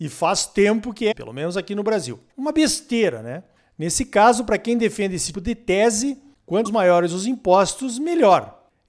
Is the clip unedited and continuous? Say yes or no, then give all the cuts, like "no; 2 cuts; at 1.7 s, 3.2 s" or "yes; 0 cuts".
no; 3 cuts; at 1.1 s, 2.3 s, 5.3 s